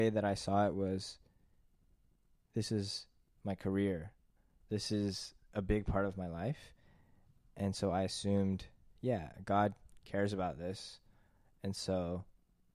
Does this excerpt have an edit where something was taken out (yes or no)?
no